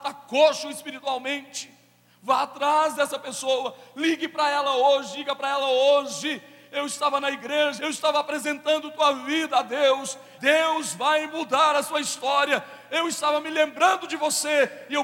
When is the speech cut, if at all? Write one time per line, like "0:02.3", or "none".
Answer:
0:07.8
0:10.4